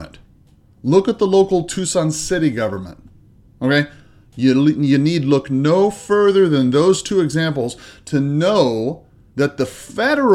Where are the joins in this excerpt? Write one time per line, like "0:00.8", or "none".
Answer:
none